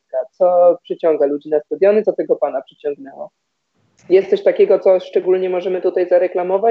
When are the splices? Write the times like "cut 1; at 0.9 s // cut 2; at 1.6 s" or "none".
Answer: none

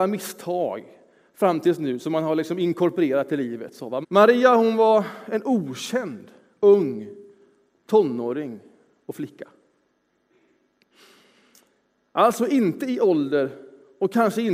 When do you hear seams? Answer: cut 1; at 4.0 s

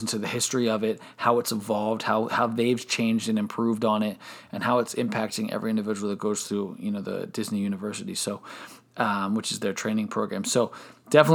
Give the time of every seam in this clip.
none

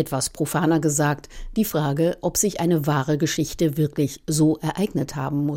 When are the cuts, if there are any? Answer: none

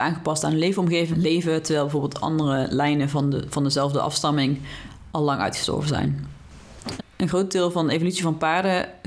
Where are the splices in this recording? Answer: cut 1; at 1.1 s // cut 2; at 7.0 s

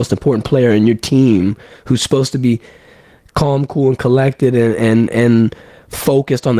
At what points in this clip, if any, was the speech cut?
none

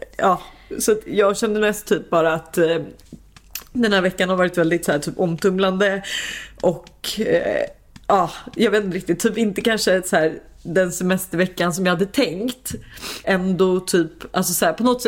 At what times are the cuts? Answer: cut 1; at 13.2 s

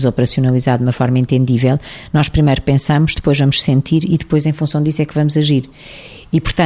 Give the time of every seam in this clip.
none

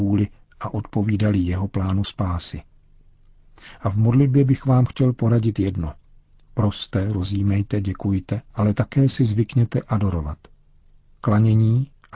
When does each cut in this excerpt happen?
cut 1; at 8.5 s

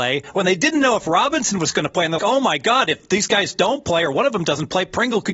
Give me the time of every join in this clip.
cut 1; at 2.2 s

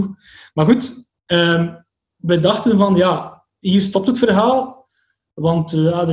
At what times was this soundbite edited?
none

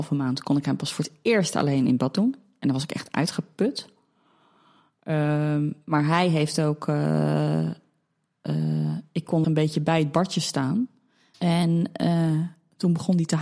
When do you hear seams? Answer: cut 1; at 9.4 s // cut 2; at 11.3 s

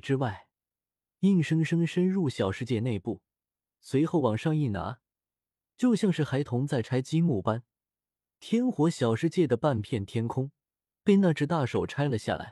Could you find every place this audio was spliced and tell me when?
none

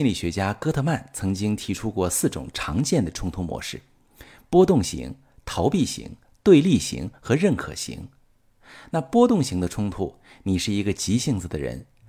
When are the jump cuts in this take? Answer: none

